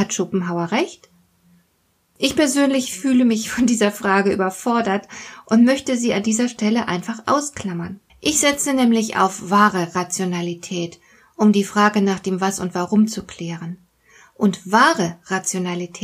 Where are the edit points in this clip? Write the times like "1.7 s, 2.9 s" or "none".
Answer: 8.1 s